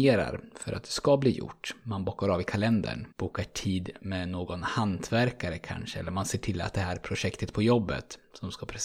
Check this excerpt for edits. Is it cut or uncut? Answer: cut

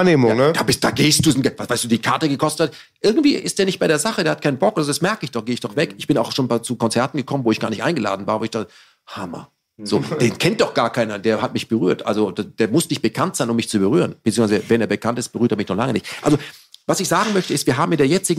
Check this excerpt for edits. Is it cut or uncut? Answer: uncut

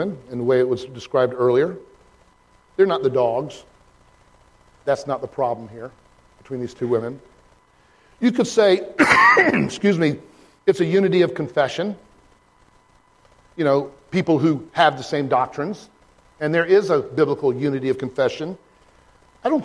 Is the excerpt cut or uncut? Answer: cut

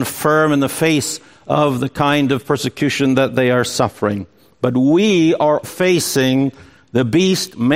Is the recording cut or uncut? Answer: cut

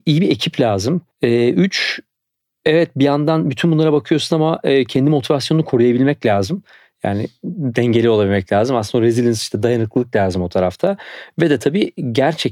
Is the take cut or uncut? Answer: cut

